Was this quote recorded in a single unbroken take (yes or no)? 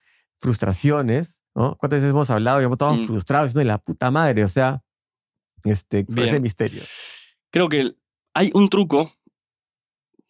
no